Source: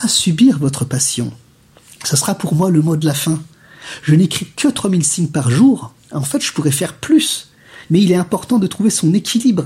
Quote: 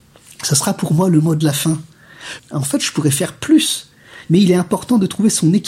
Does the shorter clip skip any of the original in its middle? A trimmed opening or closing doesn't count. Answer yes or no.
yes